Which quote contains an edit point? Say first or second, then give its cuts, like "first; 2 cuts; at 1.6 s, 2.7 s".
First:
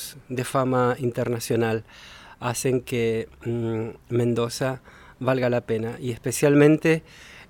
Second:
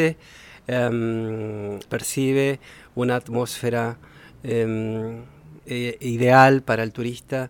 second; 2 cuts; at 1.8 s, 5.6 s